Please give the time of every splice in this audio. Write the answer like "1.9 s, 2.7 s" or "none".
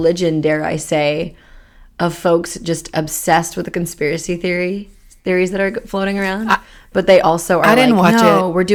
none